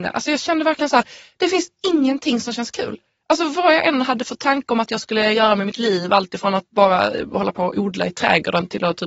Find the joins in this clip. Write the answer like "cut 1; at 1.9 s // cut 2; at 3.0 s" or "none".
cut 1; at 6.7 s